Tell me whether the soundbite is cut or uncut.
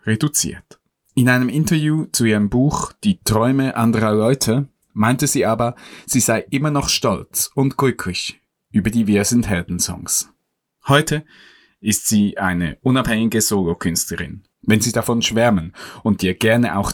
cut